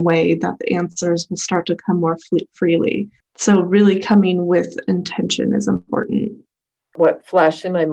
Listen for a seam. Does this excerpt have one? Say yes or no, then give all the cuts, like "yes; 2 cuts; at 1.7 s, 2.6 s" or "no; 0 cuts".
no; 0 cuts